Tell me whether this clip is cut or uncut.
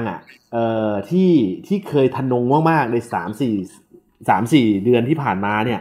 uncut